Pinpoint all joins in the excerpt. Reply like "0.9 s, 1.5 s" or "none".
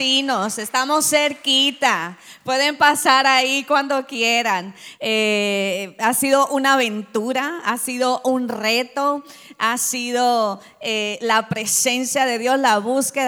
5.0 s